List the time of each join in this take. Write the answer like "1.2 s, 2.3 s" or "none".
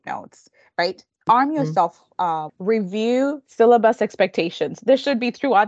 2.5 s